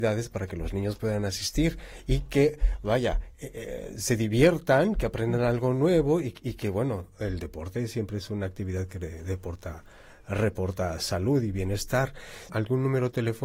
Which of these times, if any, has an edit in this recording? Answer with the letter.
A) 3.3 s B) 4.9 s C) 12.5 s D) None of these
C